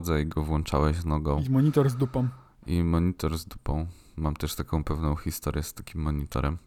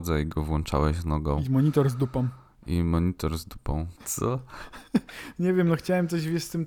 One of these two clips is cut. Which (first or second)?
second